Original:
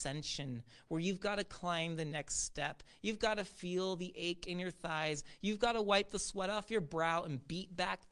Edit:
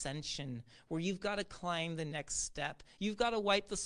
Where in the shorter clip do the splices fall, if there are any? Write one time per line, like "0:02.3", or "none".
0:03.0